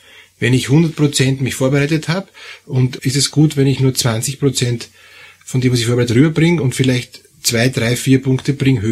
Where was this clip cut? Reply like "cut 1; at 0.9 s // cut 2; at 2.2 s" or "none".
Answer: cut 1; at 3.0 s